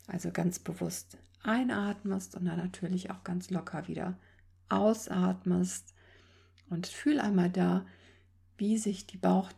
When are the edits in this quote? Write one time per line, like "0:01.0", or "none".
none